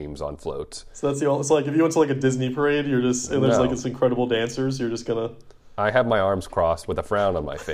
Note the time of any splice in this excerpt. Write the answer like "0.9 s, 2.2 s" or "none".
none